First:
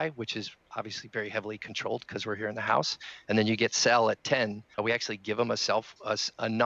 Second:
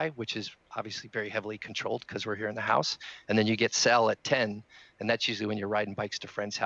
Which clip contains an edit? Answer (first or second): first